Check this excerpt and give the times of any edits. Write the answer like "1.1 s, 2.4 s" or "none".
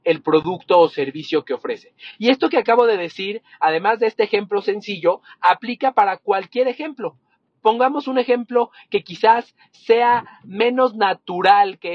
none